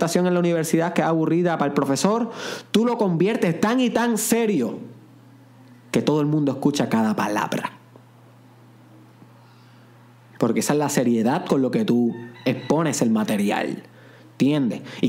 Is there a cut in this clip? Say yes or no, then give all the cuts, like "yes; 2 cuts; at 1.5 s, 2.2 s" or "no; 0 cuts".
no; 0 cuts